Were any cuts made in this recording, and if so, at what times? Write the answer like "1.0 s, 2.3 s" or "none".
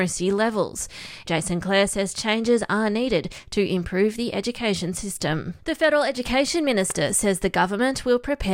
1.2 s, 5.6 s